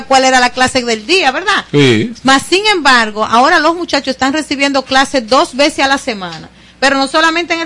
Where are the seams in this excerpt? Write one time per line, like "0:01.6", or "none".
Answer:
none